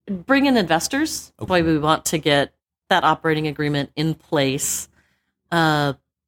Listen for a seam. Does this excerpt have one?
yes; 2 cuts; at 1.5 s, 2.8 s

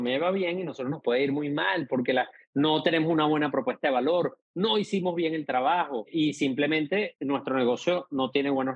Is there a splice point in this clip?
no; 0 cuts

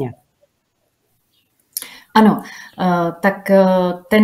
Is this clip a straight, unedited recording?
yes; 0 cuts

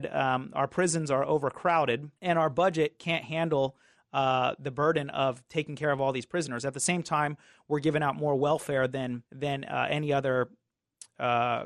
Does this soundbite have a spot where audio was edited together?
yes; 2 cuts; at 2.2 s, 9.3 s

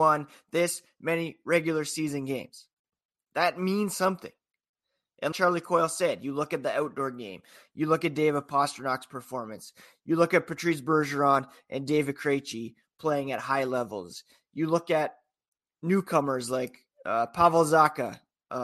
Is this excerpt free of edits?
no; 1 cut; at 5.3 s

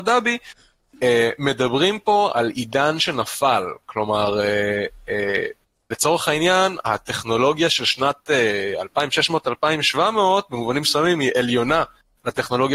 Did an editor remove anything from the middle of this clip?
yes; 1 cut; at 2.3 s

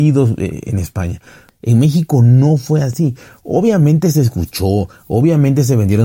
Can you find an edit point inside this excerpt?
yes; 1 cut; at 1.5 s

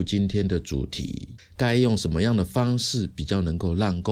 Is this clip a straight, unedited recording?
no; 1 cut; at 1.4 s

